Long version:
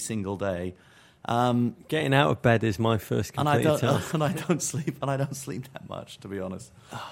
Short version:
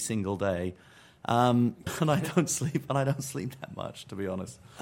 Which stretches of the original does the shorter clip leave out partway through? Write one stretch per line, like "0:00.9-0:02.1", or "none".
0:01.9-0:04.0